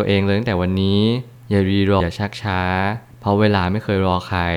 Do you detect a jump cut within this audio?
yes; 1 cut; at 2.0 s

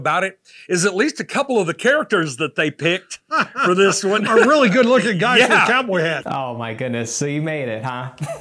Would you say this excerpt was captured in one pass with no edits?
no; 1 cut; at 6.2 s

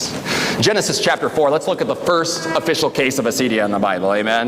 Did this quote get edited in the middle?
no; 0 cuts

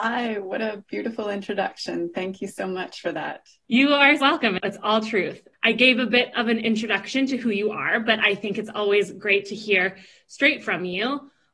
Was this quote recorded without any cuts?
no; 1 cut; at 4.2 s

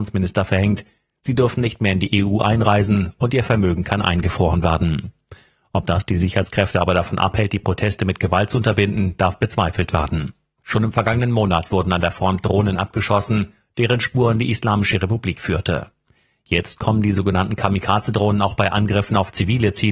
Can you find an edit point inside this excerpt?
yes; 1 cut; at 10.6 s

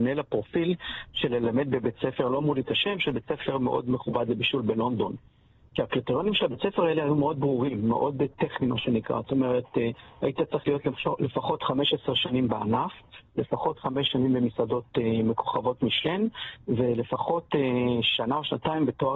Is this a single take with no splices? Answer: yes; 0 cuts

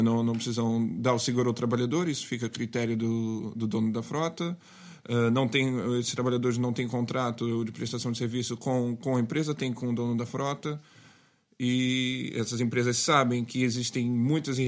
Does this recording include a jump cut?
no; 0 cuts

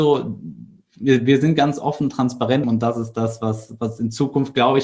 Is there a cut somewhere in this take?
yes; 1 cut; at 2.6 s

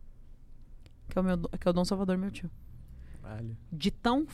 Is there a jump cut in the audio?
yes; 1 cut; at 1.1 s

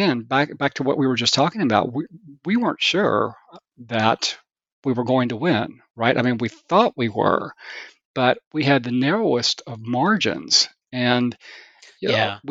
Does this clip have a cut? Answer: no; 0 cuts

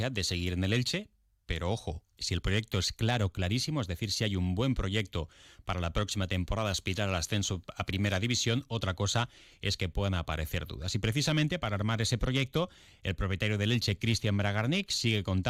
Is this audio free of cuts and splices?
yes; 0 cuts

